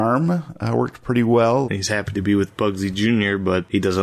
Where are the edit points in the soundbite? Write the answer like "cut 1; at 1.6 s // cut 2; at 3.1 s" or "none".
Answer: cut 1; at 1.6 s